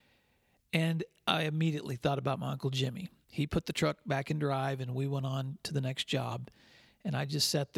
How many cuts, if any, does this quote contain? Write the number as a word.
one